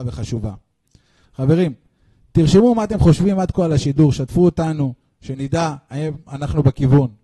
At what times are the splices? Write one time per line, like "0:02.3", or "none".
none